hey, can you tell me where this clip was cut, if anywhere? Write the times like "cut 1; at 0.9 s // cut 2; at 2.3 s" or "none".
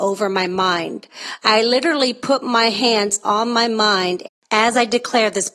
none